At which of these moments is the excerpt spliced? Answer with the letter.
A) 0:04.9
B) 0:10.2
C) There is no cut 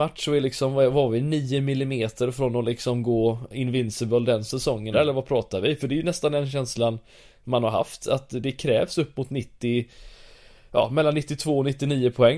A